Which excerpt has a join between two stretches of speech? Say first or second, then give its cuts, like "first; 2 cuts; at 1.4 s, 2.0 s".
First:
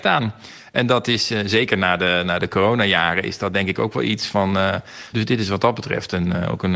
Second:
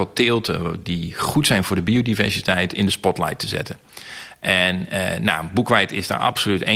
first; 1 cut; at 5.1 s